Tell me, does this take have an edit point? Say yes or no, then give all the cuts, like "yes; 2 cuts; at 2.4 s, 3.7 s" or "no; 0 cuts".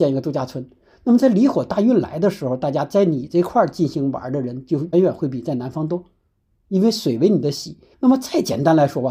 yes; 2 cuts; at 4.9 s, 7.9 s